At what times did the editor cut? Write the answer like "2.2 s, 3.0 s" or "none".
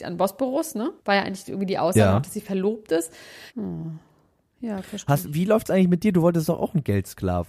1.0 s, 3.5 s